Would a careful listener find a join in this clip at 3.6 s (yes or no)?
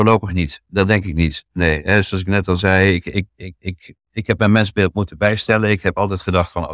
no